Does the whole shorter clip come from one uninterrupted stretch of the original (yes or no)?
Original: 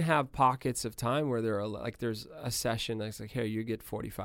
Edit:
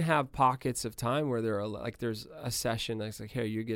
yes